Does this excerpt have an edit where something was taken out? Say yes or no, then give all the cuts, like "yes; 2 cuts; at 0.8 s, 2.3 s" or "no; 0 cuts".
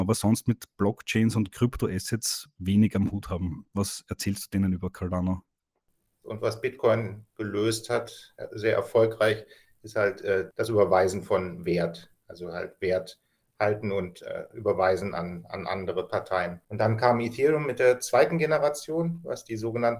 yes; 1 cut; at 6.2 s